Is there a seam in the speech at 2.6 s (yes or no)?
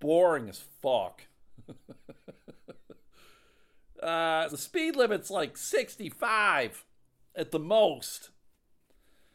no